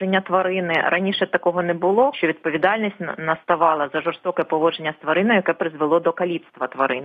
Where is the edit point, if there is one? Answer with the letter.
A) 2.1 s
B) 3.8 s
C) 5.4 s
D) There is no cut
A